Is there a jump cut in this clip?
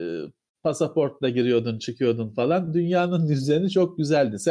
no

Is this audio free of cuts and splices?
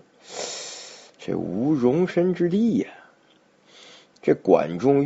no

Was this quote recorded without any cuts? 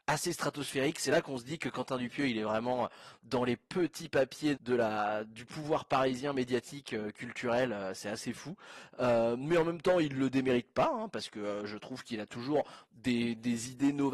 no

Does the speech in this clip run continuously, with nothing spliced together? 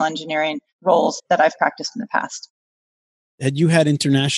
yes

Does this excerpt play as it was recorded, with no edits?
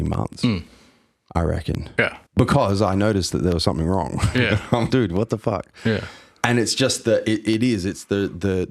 no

